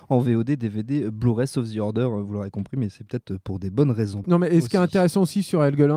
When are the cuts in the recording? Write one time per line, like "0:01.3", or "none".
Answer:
0:04.2